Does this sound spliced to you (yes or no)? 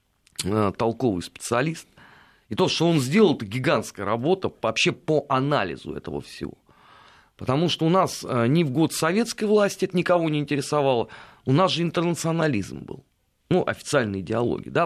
no